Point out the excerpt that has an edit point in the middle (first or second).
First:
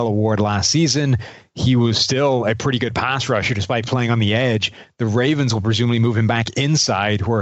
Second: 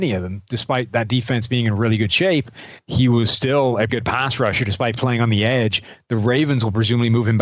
second